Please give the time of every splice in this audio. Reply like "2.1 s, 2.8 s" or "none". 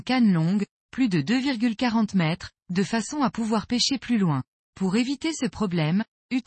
4.7 s